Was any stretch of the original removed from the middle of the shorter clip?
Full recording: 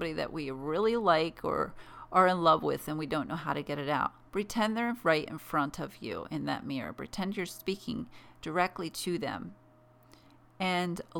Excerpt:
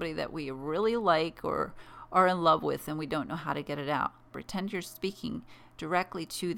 yes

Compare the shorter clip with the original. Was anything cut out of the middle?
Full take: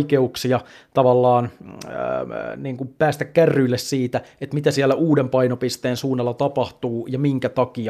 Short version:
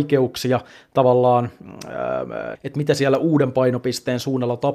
yes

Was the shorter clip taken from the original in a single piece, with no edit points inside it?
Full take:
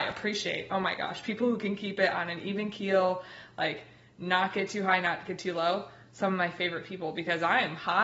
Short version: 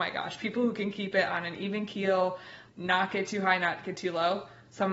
no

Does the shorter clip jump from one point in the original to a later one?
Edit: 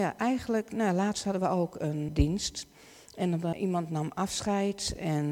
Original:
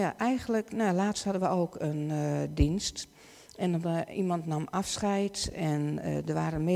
yes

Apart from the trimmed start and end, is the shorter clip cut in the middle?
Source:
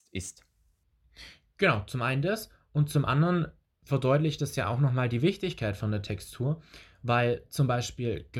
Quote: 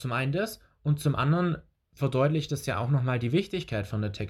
no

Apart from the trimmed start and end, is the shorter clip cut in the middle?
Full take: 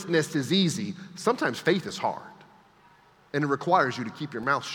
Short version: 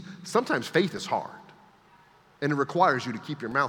no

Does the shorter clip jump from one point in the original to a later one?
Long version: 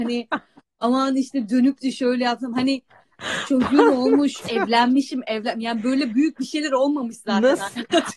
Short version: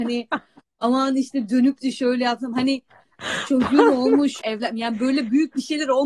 yes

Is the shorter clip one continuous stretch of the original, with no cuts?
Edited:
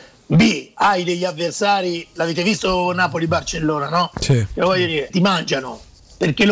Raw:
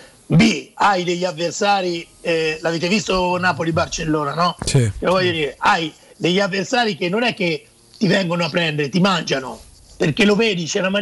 no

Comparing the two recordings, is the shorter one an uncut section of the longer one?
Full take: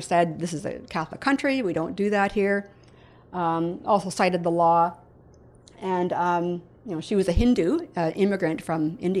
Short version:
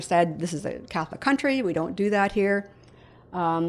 yes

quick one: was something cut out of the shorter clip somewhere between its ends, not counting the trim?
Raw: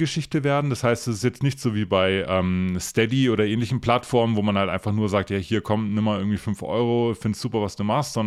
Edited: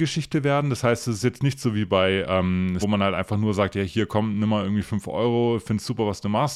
yes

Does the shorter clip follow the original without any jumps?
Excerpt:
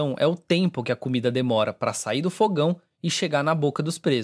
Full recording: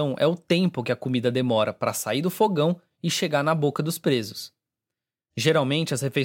yes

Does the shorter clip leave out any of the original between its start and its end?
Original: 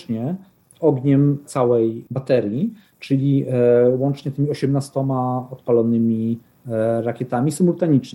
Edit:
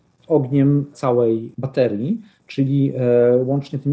no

